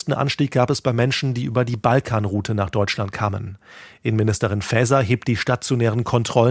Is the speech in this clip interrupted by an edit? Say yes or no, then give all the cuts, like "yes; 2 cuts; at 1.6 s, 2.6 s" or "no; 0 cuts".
no; 0 cuts